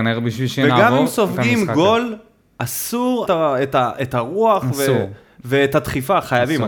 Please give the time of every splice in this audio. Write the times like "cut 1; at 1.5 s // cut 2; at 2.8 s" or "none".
cut 1; at 3.3 s